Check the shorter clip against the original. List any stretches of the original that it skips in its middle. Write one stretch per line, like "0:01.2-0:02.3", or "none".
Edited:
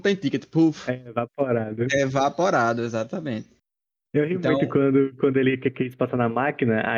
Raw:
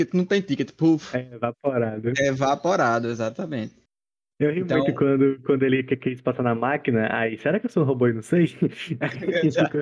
none